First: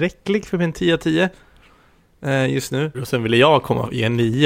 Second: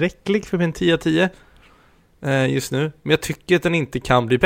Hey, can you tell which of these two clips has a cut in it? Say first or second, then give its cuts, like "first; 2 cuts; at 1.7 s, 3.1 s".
first; 1 cut; at 2.9 s